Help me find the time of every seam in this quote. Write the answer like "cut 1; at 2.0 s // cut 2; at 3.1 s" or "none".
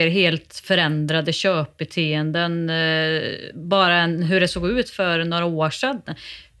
none